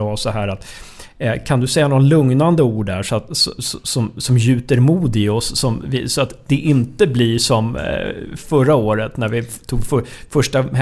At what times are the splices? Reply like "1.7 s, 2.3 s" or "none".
none